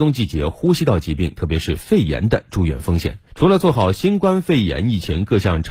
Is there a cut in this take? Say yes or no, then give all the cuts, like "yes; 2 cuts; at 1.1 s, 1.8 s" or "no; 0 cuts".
yes; 1 cut; at 3.3 s